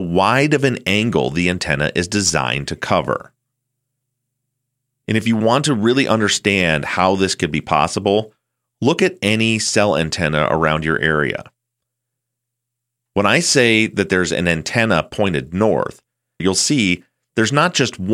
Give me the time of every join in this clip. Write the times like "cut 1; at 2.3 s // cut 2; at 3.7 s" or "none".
cut 1; at 16.4 s